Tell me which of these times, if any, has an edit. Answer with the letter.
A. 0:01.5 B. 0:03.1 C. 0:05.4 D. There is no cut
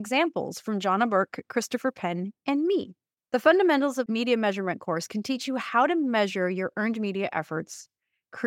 B